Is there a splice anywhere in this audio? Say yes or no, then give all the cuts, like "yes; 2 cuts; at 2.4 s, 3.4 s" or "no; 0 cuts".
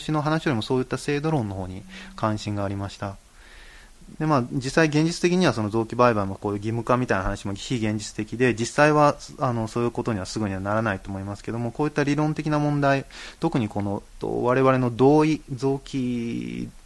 yes; 2 cuts; at 4.1 s, 14.2 s